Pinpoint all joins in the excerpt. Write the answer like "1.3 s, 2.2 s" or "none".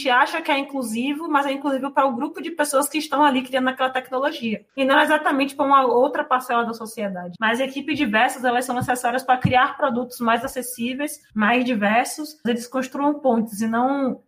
7.3 s, 12.4 s